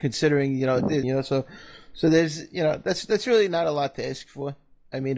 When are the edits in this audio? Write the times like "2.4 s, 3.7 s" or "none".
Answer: 1.0 s